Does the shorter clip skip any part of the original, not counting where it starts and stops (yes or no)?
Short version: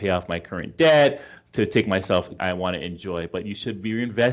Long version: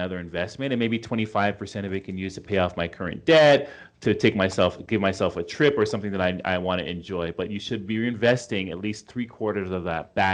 yes